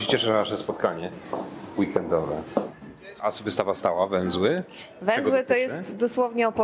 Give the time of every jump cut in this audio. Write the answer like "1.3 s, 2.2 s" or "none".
none